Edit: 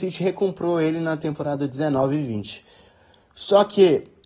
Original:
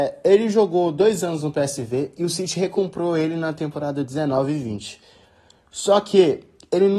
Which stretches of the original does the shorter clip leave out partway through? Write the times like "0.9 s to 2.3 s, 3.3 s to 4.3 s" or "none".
none